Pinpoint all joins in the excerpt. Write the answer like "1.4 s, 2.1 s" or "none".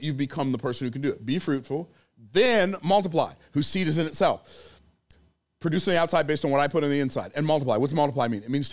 none